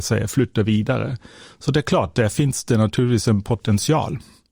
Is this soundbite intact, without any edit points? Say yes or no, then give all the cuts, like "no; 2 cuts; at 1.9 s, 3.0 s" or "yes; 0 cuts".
yes; 0 cuts